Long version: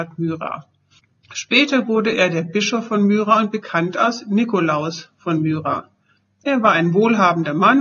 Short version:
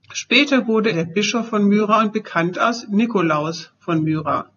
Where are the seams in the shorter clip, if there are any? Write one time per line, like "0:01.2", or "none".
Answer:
0:00.9